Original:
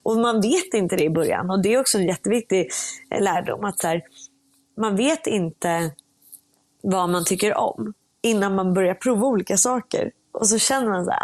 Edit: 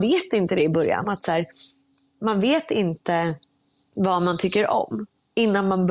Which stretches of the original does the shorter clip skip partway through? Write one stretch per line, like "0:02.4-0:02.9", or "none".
0:01.4-0:03.6
0:06.4-0:06.7